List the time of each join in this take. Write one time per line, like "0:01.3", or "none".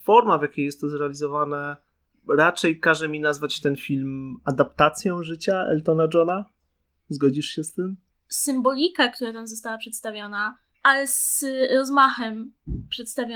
0:08.1
0:10.7